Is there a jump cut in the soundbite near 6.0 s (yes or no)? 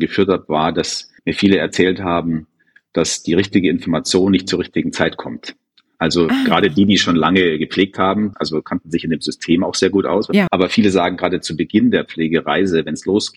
no